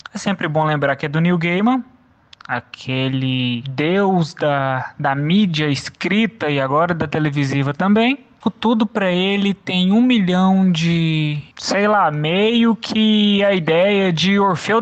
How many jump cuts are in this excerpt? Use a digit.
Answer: 2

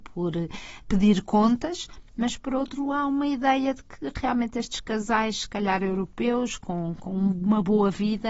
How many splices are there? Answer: 0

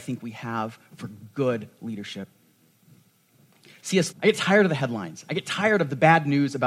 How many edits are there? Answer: 1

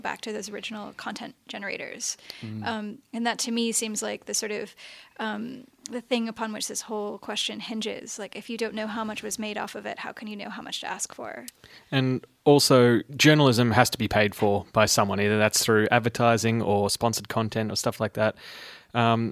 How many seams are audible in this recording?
1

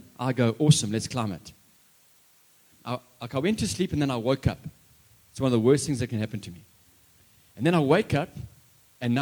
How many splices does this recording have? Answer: 1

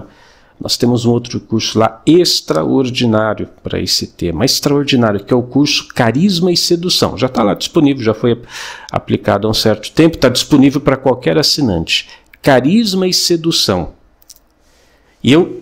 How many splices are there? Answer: 0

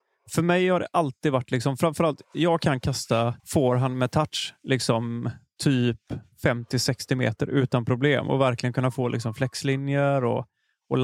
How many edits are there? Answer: 2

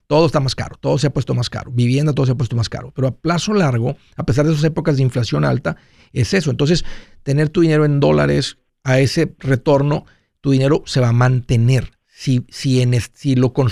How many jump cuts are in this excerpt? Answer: 0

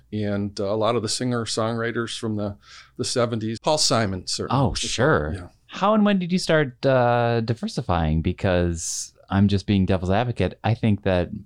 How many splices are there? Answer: 1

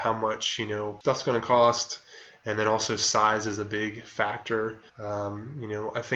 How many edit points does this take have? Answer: 1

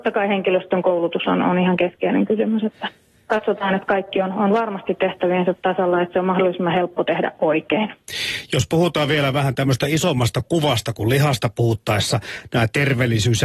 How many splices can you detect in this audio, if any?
0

